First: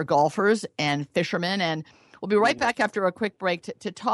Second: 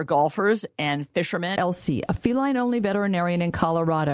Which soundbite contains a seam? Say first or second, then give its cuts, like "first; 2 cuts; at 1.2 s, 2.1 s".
second; 1 cut; at 1.6 s